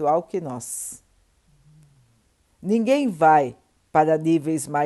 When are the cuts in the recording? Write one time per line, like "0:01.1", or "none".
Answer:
none

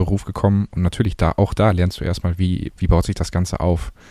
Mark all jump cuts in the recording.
0:02.7

